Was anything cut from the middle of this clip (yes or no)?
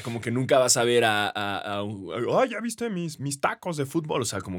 no